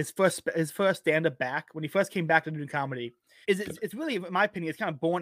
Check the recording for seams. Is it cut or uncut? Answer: cut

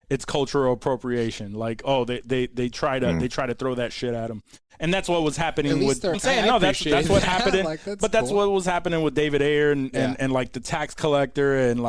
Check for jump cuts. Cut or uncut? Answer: cut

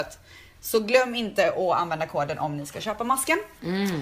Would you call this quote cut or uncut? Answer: uncut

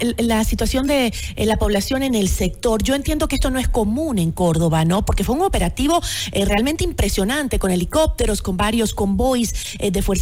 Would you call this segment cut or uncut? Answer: uncut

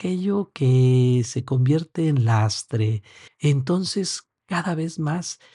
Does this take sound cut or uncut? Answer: cut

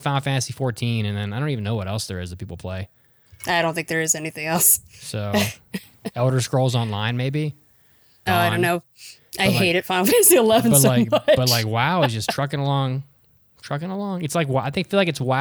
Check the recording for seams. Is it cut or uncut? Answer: cut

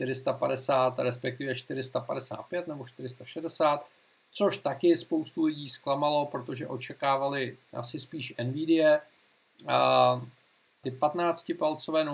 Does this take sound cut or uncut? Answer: cut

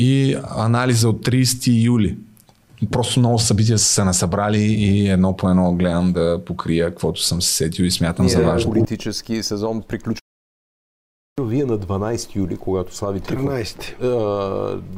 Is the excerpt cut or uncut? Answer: uncut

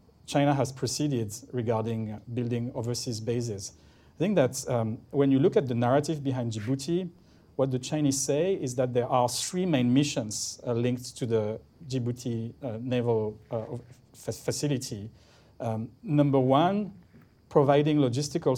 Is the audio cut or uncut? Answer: uncut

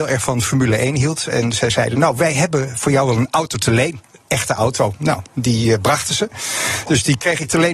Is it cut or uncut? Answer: uncut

